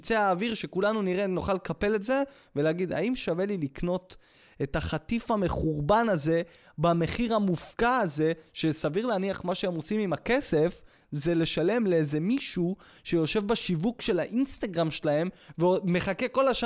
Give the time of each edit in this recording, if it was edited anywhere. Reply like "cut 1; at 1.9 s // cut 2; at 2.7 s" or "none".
none